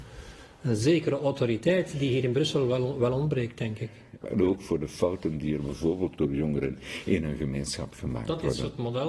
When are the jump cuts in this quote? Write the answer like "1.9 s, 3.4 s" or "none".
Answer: 4.2 s